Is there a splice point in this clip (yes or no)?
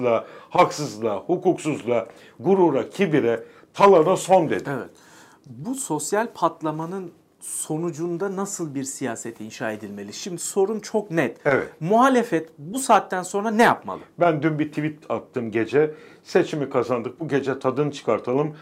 no